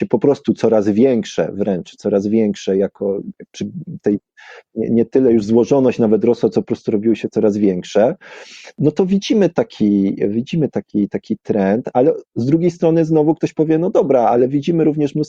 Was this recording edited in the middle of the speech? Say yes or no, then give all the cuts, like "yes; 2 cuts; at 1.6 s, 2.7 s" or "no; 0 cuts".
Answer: no; 0 cuts